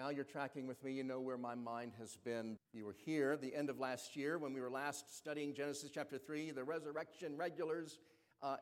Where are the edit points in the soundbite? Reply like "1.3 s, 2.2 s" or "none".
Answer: 2.6 s